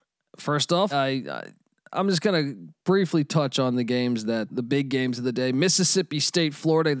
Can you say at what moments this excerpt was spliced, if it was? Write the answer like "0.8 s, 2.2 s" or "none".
0.9 s, 4.5 s